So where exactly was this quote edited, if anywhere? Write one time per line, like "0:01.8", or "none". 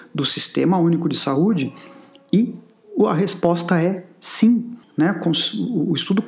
0:04.8